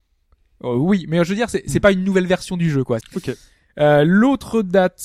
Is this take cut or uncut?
cut